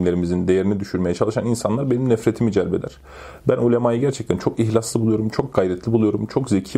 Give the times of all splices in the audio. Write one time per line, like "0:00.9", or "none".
none